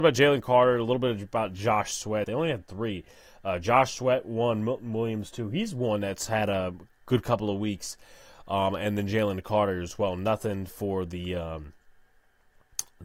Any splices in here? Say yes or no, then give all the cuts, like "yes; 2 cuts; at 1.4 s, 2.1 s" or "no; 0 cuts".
yes; 1 cut; at 2.2 s